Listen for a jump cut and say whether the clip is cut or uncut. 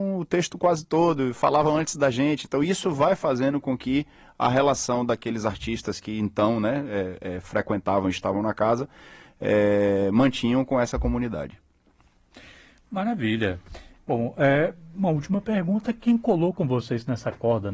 uncut